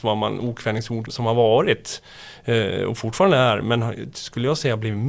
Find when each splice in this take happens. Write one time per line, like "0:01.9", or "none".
0:01.1
0:03.6